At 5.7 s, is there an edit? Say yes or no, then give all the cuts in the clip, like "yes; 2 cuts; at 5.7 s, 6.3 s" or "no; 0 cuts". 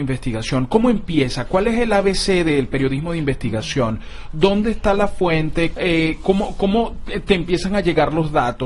yes; 1 cut; at 5.7 s